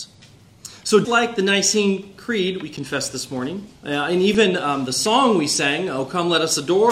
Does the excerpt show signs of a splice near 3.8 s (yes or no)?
yes